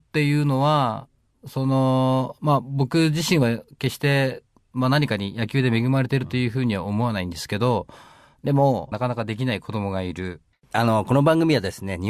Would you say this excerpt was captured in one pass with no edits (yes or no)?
no